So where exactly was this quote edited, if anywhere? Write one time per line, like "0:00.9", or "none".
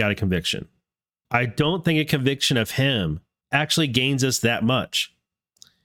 0:01.2
0:03.4

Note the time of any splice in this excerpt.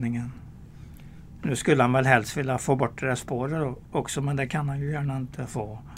0:01.4

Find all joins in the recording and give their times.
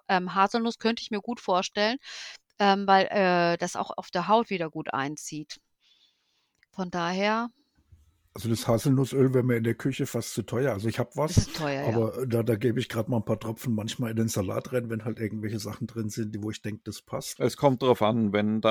0:17.4

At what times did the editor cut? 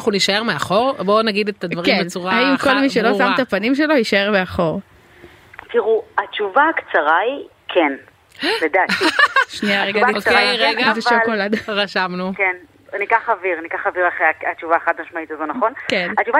none

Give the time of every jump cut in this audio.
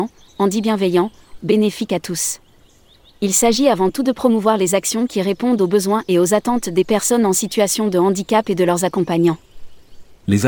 0:01.4

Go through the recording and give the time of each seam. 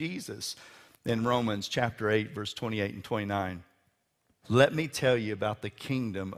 0:04.4

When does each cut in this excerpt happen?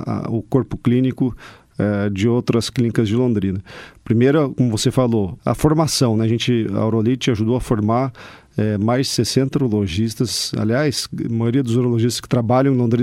0:05.4

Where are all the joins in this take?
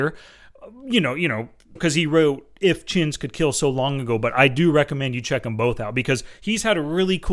0:01.8

